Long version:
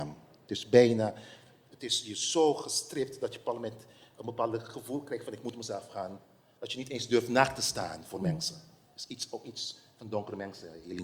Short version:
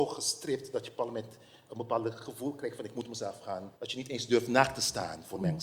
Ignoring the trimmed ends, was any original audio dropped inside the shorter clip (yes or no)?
yes